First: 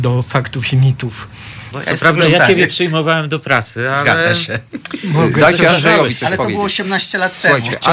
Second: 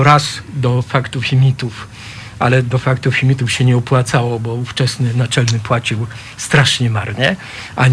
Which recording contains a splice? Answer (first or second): first